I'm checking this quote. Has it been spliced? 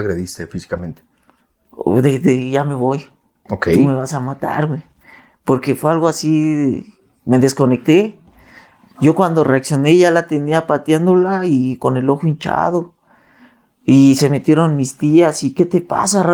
no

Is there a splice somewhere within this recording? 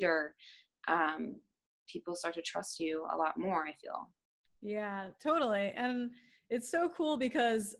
no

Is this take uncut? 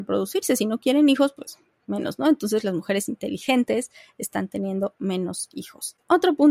yes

